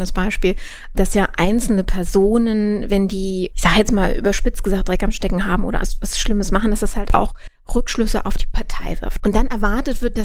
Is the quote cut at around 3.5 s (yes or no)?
no